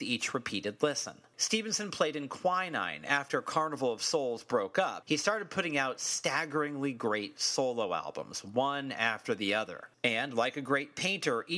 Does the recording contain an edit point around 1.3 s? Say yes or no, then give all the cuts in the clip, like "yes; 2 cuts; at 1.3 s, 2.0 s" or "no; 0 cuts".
yes; 3 cuts; at 1.3 s, 5.0 s, 9.9 s